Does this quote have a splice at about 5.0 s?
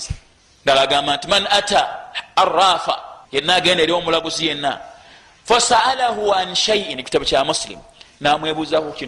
no; 1 cut; at 3.3 s

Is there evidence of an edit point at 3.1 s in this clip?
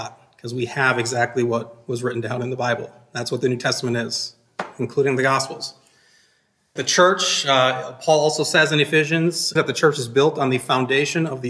no; 2 cuts; at 6.8 s, 9.6 s

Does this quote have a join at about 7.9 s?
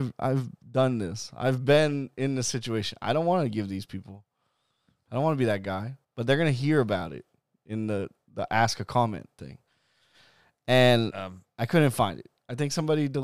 no; 1 cut; at 6.0 s

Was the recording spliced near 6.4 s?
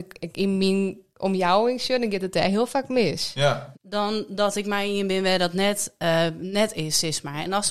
no; 1 cut; at 3.7 s

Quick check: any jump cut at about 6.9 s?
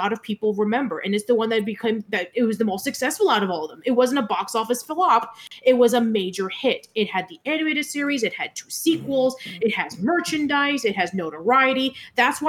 no; 0 cuts

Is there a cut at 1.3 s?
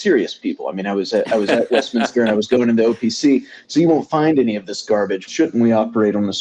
no; 1 cut; at 5.3 s

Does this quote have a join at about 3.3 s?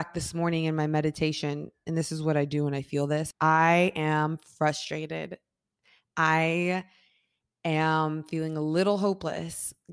yes; 1 cut; at 3.3 s

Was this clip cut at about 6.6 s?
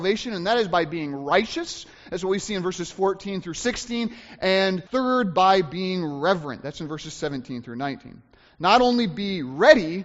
no; 1 cut; at 4.9 s

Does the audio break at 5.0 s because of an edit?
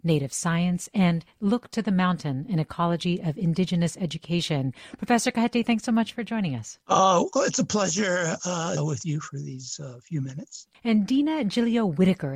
no; 3 cuts; at 6.8 s, 8.8 s, 10.7 s

